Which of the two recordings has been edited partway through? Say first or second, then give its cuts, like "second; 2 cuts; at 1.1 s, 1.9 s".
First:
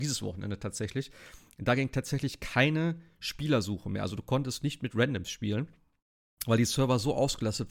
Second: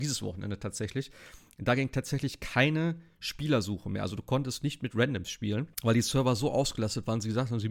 second; 1 cut; at 5.7 s